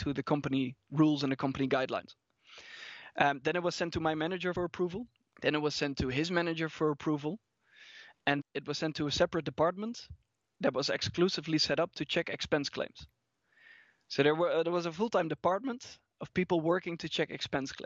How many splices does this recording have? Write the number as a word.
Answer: one